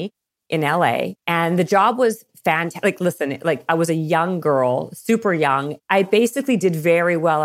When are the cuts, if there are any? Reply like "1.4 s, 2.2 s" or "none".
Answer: 1.2 s, 5.8 s